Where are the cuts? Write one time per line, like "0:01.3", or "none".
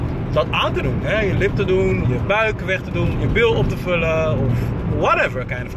0:02.0
0:03.1